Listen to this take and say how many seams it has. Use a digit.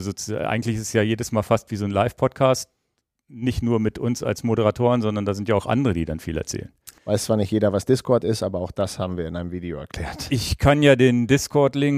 1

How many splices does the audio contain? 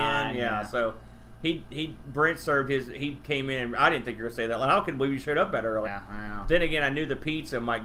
1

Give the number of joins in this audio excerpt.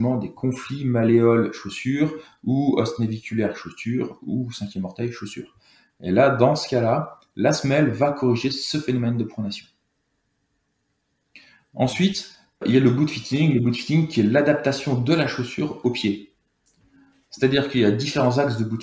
1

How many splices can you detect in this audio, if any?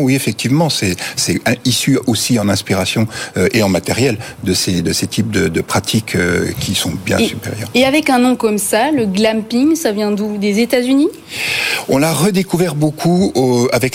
0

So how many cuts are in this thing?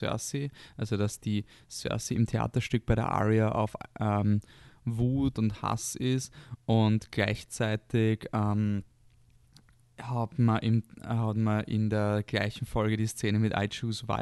1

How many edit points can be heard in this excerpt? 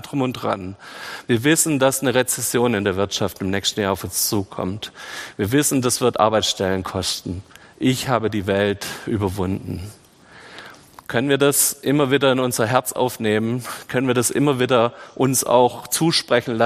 1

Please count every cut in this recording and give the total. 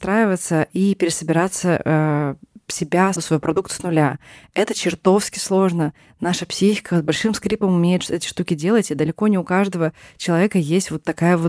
1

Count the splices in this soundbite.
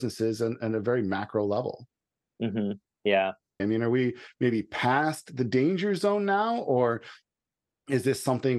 1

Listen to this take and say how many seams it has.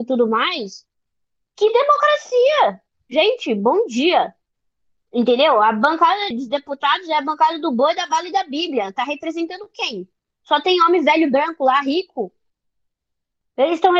1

